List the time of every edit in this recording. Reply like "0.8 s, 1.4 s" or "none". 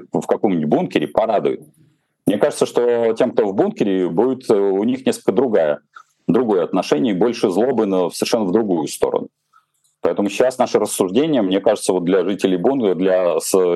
none

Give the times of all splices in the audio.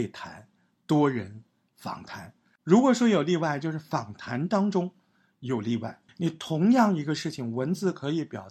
6.1 s

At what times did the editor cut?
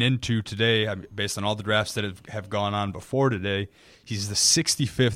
none

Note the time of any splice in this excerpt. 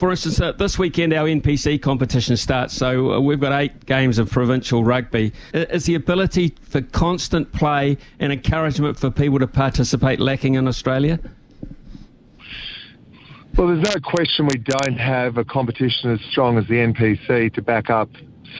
5.5 s

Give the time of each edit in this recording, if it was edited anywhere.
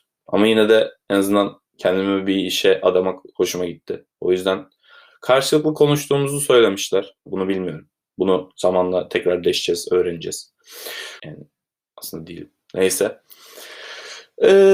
7.3 s, 11.2 s

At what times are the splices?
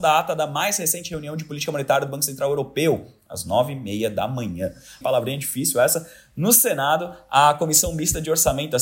5.0 s

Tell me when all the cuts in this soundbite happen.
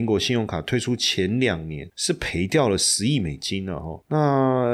none

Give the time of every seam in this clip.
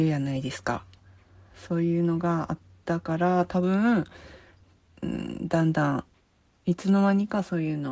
none

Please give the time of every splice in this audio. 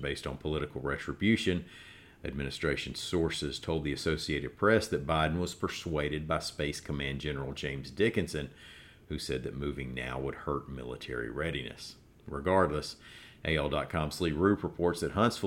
none

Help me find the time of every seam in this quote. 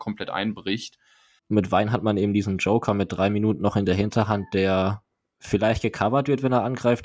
1.4 s

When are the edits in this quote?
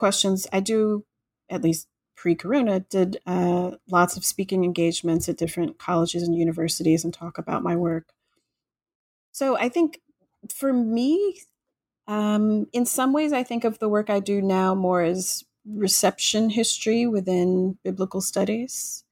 9.3 s

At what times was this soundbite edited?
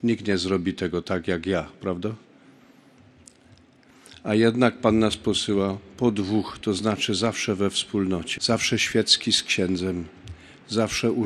8.4 s

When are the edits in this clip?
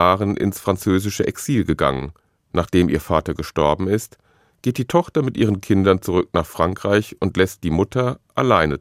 2.4 s

